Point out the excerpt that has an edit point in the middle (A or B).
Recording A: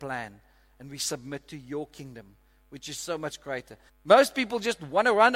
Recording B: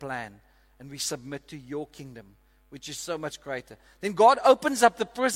A